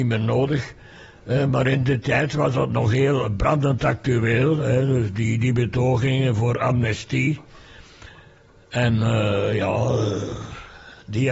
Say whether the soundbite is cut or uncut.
uncut